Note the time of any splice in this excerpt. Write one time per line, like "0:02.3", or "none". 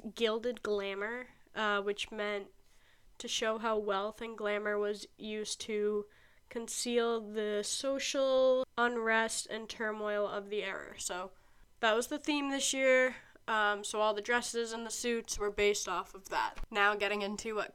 none